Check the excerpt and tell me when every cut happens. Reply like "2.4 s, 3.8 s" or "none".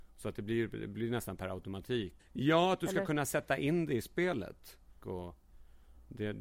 2.2 s, 5.0 s